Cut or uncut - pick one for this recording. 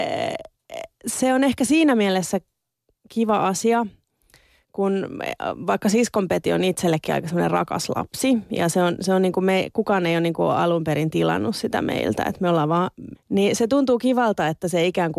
cut